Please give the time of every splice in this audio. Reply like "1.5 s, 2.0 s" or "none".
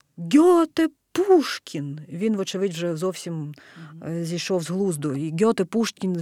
none